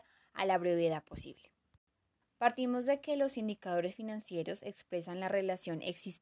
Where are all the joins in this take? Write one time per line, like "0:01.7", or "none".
0:02.2

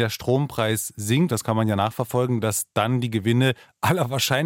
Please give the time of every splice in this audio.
0:01.3

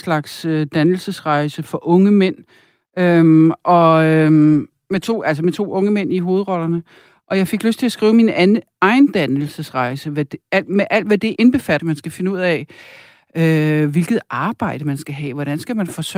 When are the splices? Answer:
0:11.8

